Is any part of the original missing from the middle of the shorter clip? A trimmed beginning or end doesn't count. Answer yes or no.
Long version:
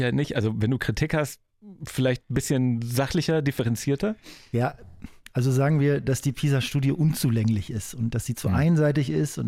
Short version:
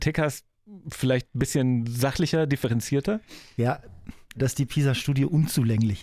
yes